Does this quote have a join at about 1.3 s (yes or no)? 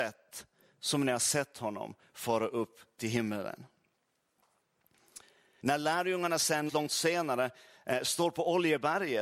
no